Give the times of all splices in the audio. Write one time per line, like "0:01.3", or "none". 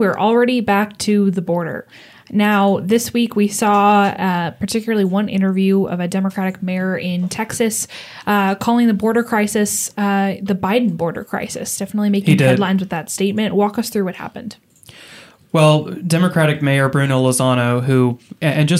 none

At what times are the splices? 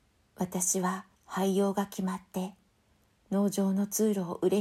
0:01.1

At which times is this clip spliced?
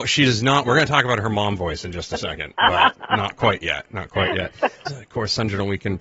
0:03.0
0:04.9

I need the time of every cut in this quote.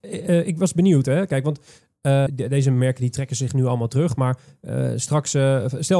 0:02.3

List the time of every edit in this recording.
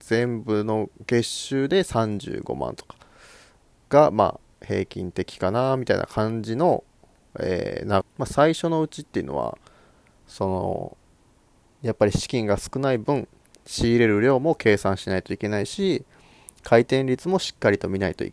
0:08.0

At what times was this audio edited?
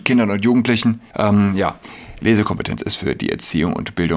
0:01.1

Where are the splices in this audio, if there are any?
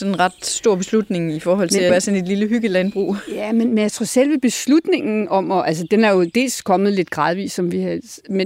0:01.9

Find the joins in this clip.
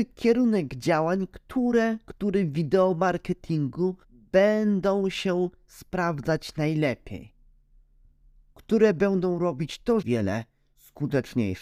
0:04.0
0:10.0

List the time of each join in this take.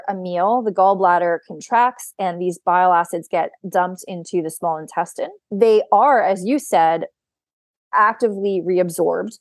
0:05.4

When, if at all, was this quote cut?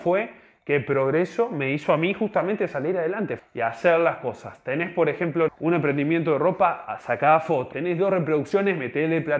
0:03.4
0:05.5
0:07.7

